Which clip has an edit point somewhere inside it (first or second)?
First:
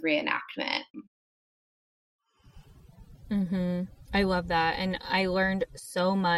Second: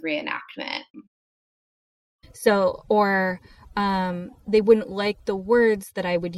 second